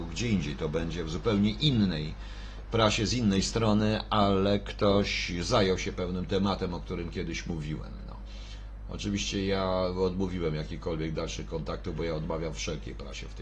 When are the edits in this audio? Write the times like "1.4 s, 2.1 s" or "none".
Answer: none